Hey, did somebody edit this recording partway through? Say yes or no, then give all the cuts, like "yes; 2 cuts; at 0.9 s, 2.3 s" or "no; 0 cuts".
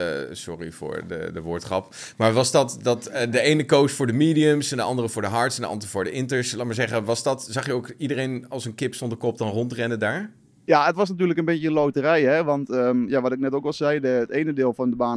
no; 0 cuts